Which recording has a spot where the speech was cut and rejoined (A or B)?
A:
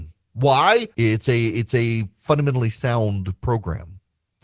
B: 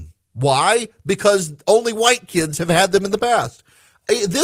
A